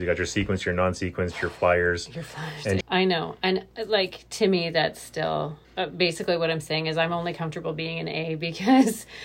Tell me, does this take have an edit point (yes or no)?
yes